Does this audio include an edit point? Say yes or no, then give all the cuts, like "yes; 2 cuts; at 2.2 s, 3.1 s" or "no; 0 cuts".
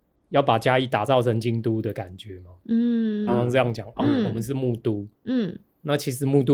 yes; 1 cut; at 3.3 s